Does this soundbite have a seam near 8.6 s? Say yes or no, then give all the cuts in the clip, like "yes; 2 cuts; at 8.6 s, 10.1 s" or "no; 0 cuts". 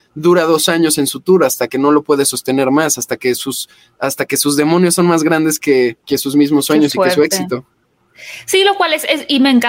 no; 1 cut; at 6.0 s